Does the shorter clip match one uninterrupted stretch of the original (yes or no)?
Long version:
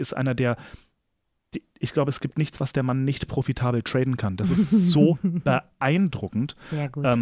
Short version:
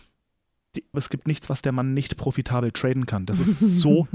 no